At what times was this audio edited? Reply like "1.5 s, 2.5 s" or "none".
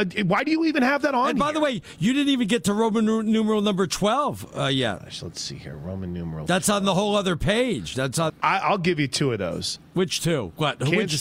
8.3 s, 9.9 s

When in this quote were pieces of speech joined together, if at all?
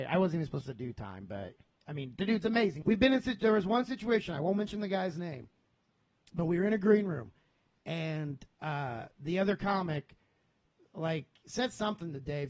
2.8 s

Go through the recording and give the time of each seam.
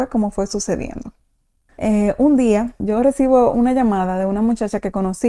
2.8 s

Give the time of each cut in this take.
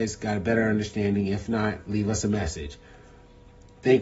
none

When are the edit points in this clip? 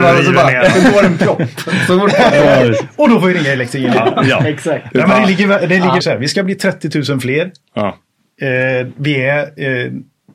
6.0 s

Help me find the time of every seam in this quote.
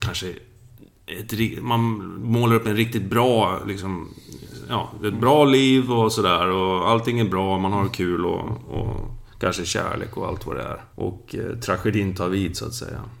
10.9 s

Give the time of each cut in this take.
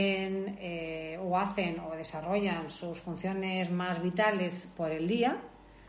none

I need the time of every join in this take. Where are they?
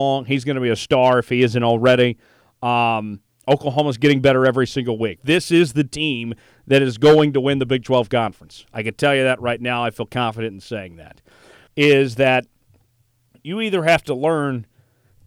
5.2 s, 11.7 s

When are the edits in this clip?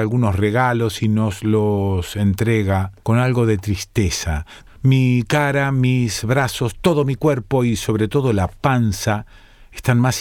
3.0 s, 4.7 s

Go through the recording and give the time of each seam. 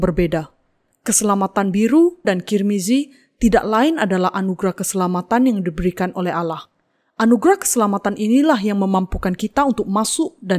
2.2 s

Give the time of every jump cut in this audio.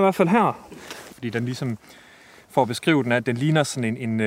1.1 s

